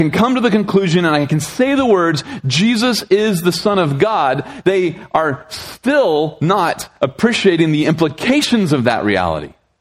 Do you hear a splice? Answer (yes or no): no